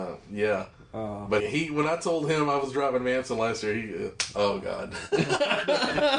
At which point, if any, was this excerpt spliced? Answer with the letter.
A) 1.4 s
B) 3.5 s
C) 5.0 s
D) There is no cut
A